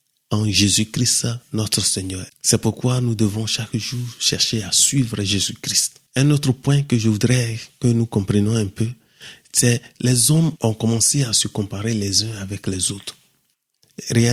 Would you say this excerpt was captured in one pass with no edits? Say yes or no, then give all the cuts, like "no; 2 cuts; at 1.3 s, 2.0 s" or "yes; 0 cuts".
no; 2 cuts; at 2.3 s, 6.1 s